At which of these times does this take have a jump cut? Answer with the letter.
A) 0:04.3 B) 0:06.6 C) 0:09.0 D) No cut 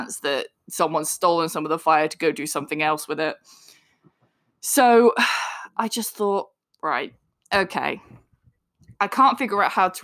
D